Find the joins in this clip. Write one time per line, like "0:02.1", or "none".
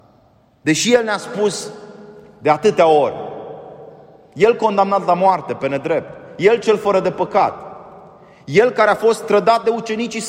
none